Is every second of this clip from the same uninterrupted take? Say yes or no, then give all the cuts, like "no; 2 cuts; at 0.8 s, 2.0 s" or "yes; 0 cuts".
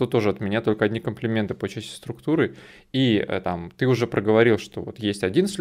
yes; 0 cuts